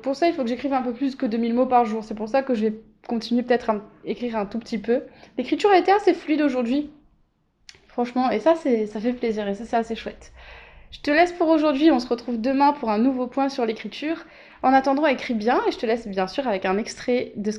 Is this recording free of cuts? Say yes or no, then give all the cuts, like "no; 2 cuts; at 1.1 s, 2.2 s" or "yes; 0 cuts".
yes; 0 cuts